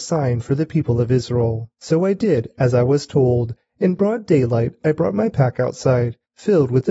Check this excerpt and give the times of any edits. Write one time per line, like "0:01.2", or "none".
none